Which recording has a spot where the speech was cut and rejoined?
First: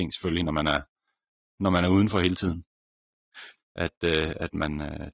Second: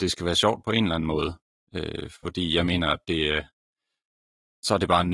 first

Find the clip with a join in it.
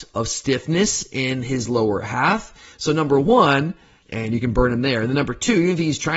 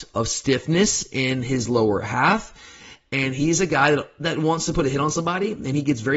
first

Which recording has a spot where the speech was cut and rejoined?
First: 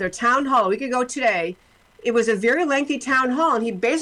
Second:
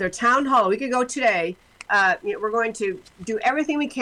second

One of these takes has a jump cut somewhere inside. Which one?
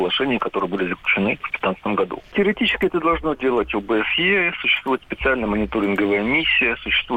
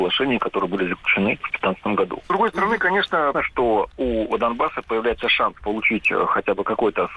second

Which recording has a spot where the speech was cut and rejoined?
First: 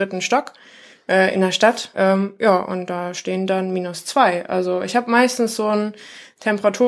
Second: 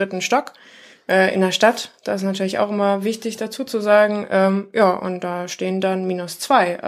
first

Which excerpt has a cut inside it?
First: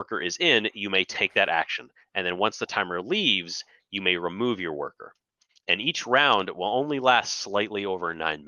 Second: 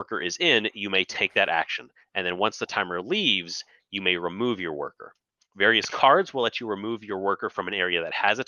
first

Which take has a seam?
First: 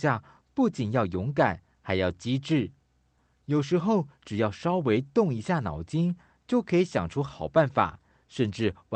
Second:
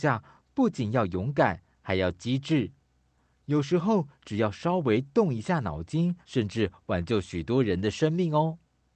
second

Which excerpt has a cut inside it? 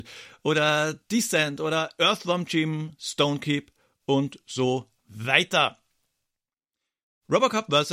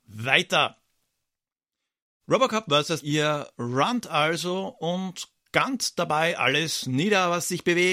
second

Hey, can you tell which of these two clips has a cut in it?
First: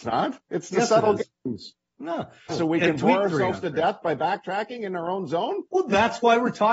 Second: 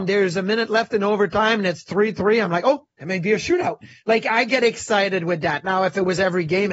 first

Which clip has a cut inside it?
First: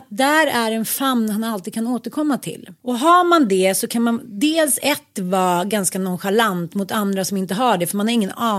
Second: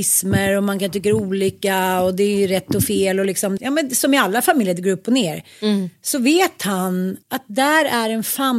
second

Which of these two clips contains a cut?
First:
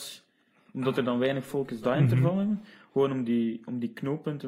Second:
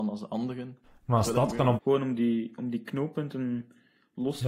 second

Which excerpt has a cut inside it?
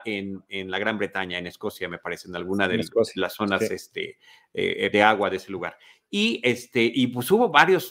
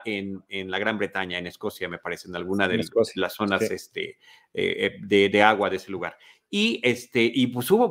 first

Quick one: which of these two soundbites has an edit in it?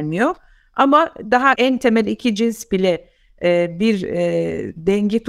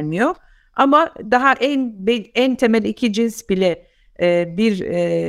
first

